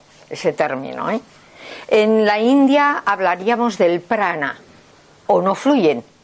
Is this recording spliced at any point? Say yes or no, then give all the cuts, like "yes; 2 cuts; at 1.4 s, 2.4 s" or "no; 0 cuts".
yes; 1 cut; at 5.3 s